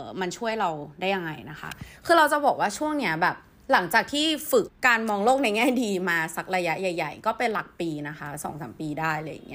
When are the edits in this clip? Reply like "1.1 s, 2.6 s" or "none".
4.7 s